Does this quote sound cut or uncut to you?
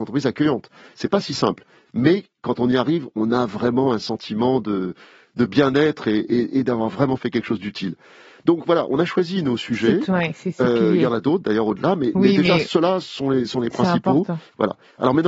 uncut